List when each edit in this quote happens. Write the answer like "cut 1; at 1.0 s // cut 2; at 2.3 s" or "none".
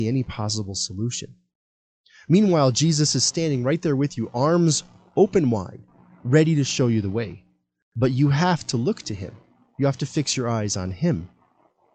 none